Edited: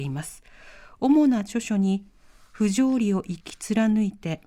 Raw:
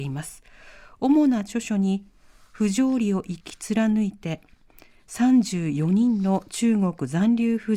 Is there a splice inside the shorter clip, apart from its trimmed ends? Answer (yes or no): no